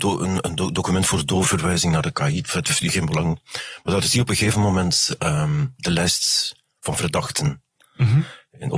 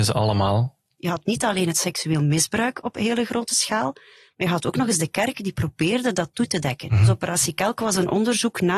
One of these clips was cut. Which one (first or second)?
second